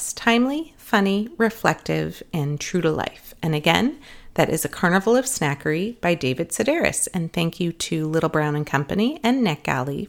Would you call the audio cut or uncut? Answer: uncut